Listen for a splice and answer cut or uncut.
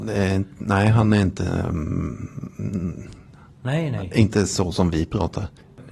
uncut